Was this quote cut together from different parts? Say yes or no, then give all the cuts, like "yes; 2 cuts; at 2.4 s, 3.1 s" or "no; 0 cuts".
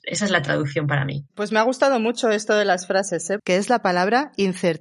yes; 1 cut; at 3.4 s